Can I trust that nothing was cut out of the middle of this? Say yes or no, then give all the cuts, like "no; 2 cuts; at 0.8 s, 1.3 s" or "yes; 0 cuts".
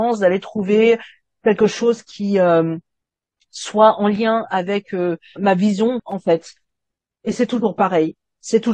yes; 0 cuts